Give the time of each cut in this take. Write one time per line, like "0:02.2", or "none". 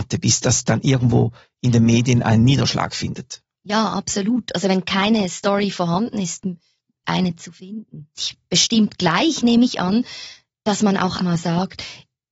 0:07.0
0:08.2
0:11.2